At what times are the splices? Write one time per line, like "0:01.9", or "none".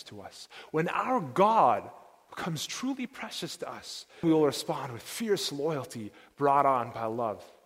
0:04.2